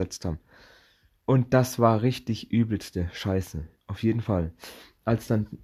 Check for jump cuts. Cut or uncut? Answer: uncut